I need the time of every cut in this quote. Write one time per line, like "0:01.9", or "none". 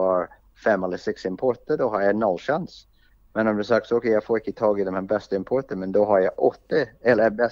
none